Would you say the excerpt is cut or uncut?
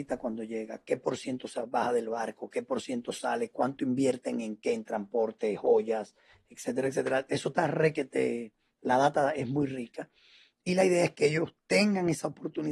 uncut